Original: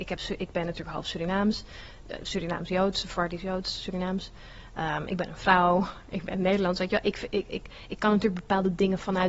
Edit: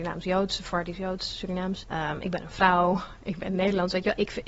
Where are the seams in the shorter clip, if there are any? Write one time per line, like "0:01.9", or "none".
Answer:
0:01.8